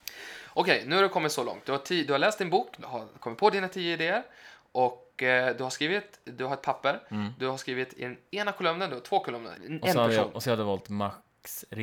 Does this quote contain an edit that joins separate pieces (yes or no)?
yes